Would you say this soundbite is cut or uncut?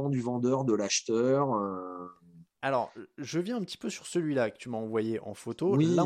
uncut